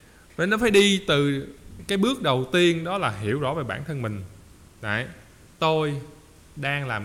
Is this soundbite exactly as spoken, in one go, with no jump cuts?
yes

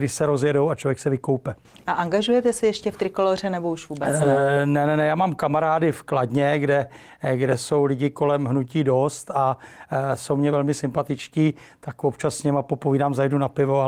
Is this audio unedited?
yes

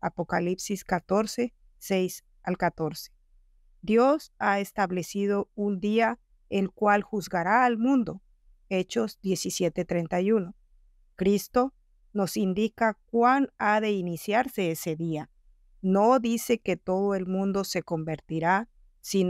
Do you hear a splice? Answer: no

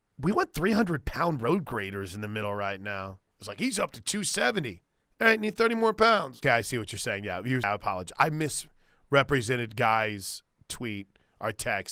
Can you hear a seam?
yes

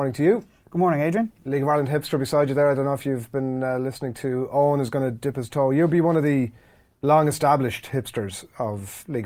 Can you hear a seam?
no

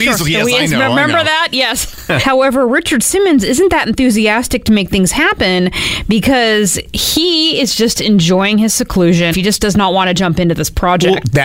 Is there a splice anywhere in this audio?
yes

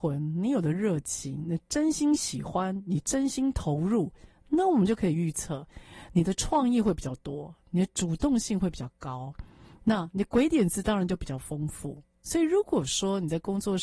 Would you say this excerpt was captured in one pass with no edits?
yes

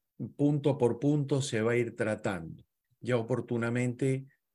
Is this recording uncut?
no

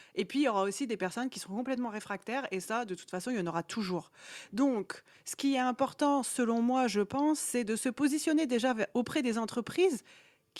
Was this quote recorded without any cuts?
yes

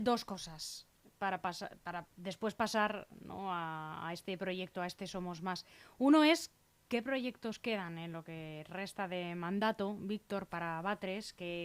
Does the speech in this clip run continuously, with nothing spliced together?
yes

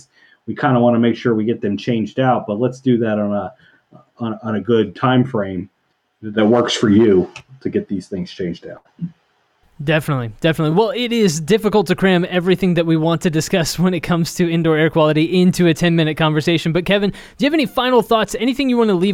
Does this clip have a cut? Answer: no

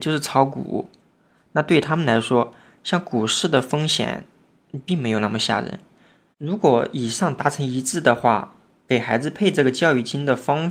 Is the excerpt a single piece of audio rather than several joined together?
no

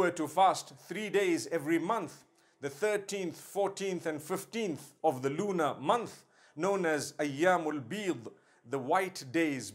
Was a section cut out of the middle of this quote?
no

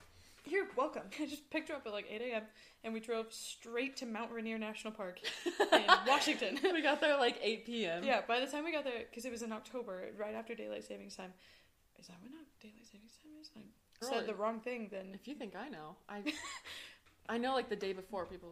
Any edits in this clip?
yes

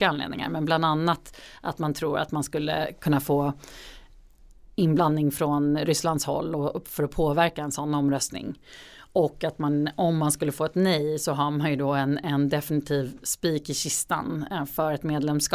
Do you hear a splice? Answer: no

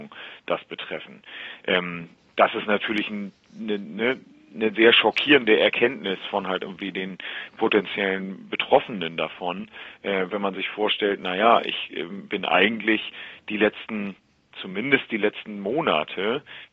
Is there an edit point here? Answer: no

